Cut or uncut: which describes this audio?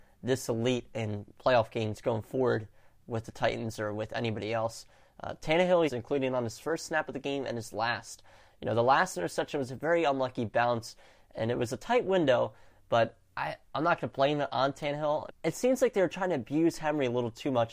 cut